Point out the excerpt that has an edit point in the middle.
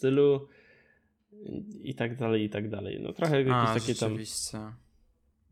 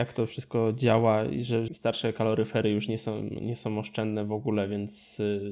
second; 1 cut; at 1.7 s

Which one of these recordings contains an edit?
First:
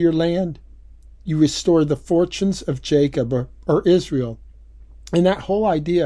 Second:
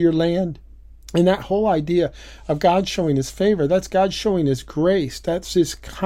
second; 1 cut; at 1.0 s

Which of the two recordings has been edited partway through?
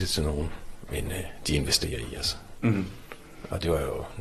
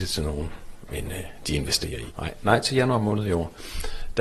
second; 1 cut; at 2.1 s

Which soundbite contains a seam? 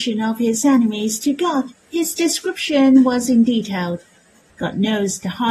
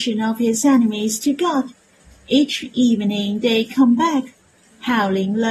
first; 2 cuts; at 1.8 s, 4.5 s

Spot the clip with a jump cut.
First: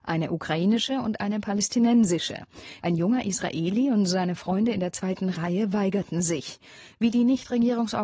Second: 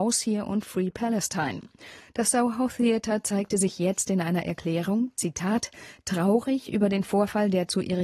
first; 1 cut; at 2.8 s

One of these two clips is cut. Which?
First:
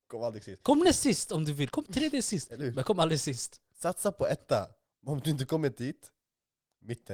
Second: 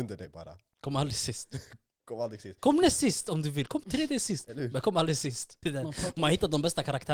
second; 1 cut; at 5.6 s

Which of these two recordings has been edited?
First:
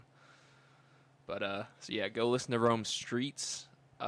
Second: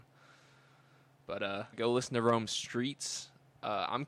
second; 1 cut; at 1.7 s

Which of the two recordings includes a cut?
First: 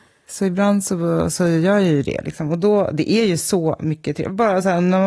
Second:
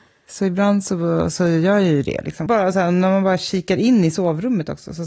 second; 1 cut; at 2.5 s

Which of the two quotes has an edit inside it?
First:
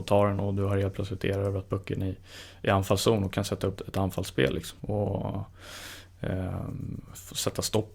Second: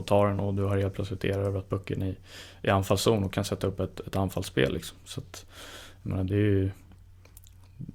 first; 2 cuts; at 3.8 s, 4.8 s

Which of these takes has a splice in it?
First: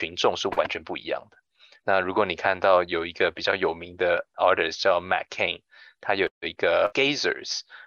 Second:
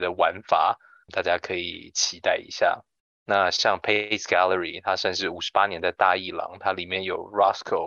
first; 1 cut; at 1.8 s

